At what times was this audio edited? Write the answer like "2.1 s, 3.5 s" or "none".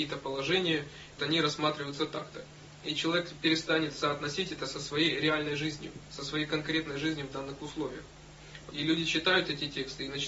1.2 s, 8.7 s